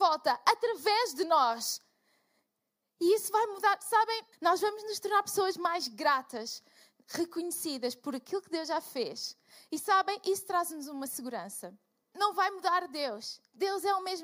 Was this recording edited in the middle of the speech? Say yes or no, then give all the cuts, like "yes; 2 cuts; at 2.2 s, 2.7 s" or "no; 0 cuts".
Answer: yes; 2 cuts; at 4.3 s, 12.1 s